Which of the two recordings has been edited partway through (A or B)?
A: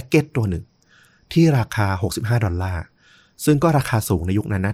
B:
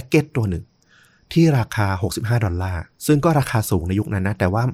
B